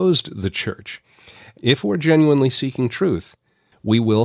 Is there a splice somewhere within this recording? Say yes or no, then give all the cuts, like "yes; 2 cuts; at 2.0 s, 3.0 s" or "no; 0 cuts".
yes; 1 cut; at 1.5 s